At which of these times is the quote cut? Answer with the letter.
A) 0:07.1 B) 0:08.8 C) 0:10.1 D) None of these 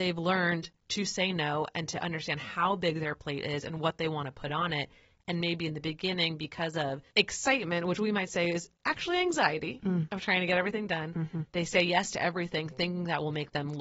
A